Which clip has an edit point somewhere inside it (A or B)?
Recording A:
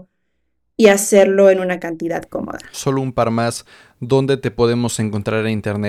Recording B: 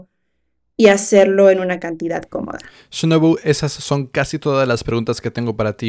A